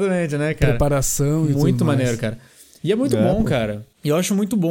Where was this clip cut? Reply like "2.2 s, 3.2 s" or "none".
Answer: none